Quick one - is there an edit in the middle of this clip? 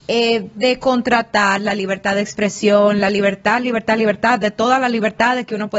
no; 0 cuts

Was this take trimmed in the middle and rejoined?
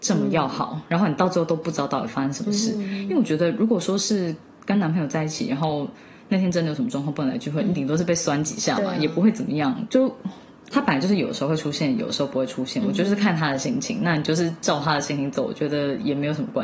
yes; 1 cut; at 10.7 s

